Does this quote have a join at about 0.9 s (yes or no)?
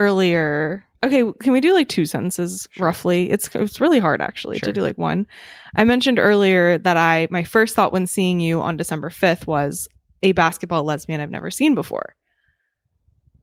yes